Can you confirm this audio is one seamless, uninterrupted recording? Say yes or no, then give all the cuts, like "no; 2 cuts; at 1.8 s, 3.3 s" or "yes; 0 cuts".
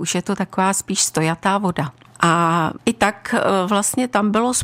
no; 1 cut; at 2.1 s